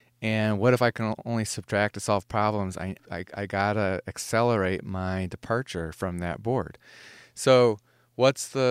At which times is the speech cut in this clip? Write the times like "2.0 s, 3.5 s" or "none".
3.0 s